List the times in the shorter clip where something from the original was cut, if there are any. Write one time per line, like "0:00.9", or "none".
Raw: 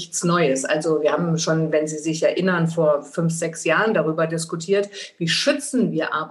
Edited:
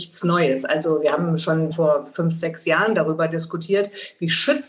0:01.7